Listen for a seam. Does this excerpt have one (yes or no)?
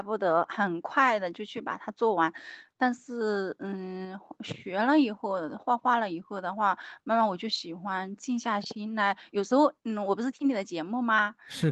no